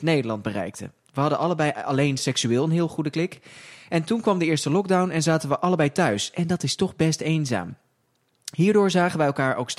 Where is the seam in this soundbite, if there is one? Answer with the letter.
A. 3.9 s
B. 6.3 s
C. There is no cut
C